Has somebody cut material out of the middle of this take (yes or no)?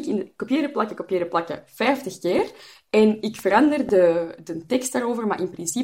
no